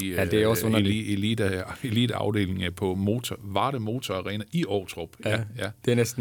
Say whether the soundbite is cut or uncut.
uncut